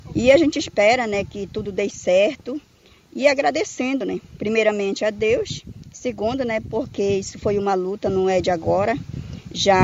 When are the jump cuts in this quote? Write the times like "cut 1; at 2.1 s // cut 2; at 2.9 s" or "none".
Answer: none